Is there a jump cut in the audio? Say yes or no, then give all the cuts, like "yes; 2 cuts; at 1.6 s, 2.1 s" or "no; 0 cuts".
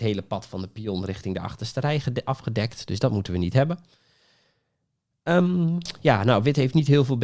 no; 0 cuts